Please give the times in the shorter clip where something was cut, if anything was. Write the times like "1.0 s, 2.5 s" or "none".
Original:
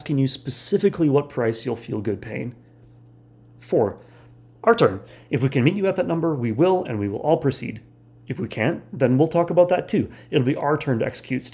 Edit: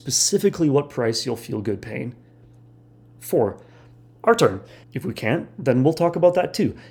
4.8 s